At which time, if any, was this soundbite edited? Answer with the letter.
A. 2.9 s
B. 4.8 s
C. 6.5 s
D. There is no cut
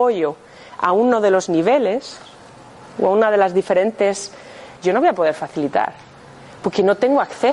B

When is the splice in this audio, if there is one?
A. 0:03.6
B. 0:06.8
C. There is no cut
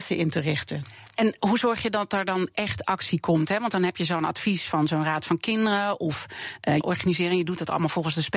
B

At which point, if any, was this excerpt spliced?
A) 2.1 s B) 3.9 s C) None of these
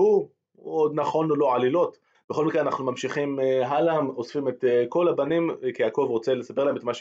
A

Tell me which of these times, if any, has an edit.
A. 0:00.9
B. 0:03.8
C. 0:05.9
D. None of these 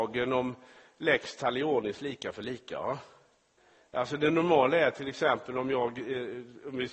D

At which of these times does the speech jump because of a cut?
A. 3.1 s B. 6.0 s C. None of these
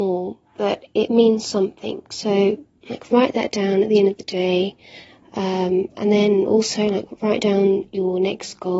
C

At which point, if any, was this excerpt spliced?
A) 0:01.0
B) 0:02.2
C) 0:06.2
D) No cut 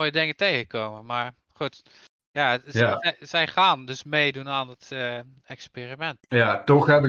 C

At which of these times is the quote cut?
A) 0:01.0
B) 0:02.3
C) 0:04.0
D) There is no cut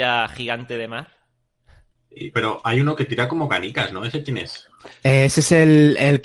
B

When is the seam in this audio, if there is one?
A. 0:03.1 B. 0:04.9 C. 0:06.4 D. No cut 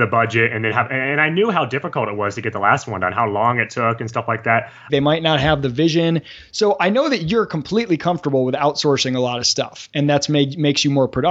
B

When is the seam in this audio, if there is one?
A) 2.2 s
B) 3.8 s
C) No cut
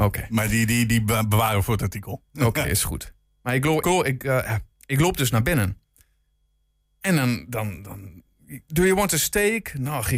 B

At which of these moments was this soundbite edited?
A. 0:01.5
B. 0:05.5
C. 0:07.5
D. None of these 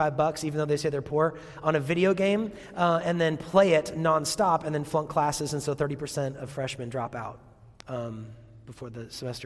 D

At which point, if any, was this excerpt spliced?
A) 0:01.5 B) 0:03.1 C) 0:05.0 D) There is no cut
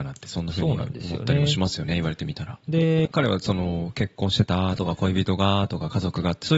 B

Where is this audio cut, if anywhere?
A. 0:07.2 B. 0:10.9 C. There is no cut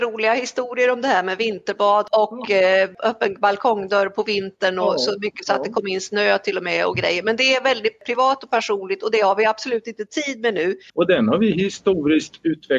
B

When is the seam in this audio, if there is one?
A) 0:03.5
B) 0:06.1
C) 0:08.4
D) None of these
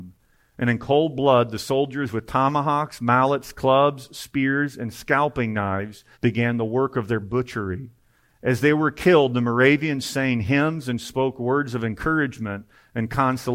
B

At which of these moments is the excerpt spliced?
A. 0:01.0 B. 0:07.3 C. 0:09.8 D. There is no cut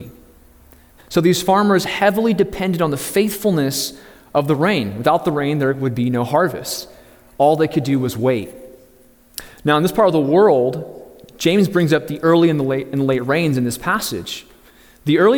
A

